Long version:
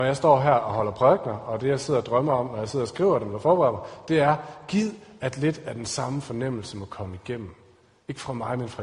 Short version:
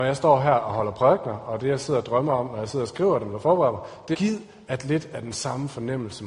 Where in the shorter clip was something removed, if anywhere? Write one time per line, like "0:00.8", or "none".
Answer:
0:04.1

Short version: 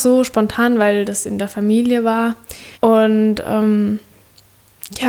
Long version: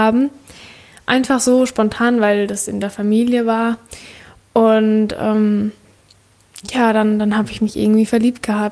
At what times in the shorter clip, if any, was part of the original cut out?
0:02.7

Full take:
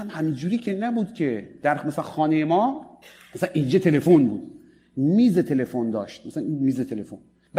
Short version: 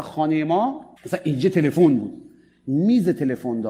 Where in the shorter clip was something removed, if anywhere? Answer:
0:01.0

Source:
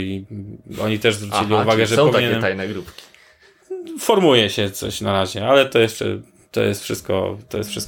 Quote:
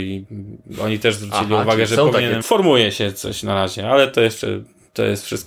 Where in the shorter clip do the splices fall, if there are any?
0:02.4

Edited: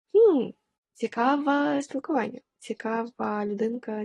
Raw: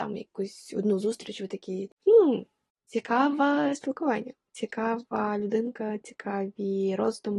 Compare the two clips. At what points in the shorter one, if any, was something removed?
none

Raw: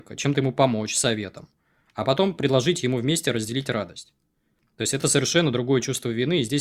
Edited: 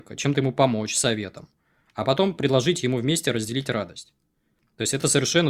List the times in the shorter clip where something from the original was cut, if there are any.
none

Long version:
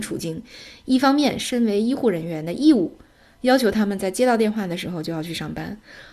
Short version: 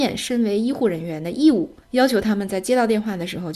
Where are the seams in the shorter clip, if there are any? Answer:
0:01.8

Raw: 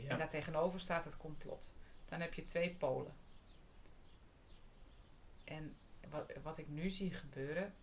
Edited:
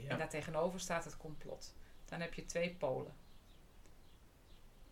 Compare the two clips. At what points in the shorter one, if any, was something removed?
none

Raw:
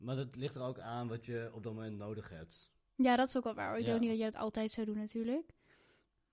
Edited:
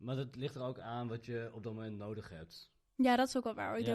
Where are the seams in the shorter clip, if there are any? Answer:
none

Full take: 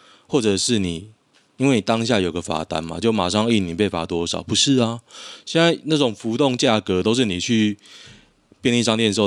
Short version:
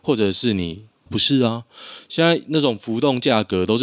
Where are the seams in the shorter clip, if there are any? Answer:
0:01.1

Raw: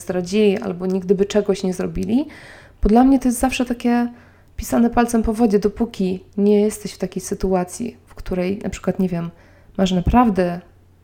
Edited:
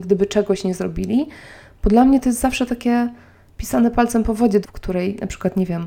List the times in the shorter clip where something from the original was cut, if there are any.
0:04.6

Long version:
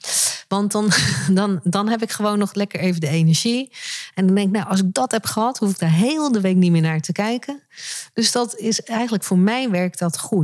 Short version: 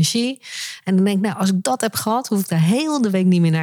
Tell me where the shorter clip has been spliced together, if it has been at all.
none

